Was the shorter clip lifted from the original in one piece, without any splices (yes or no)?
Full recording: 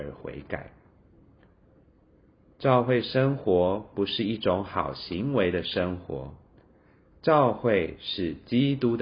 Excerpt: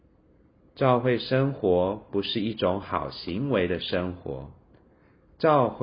yes